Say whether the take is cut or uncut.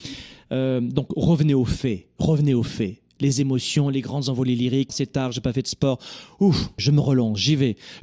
cut